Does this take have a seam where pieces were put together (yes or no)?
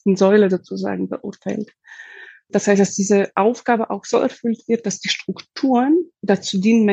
no